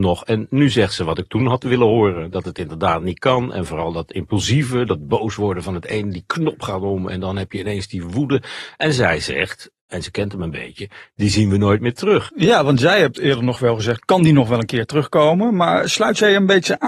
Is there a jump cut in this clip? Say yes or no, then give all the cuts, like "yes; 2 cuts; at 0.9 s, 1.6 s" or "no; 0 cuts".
yes; 2 cuts; at 12.3 s, 14.0 s